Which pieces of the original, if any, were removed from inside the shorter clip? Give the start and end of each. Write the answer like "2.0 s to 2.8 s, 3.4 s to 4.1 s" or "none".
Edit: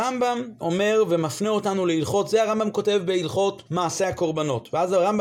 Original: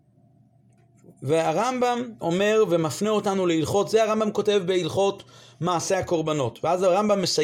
5.3 s to 5.6 s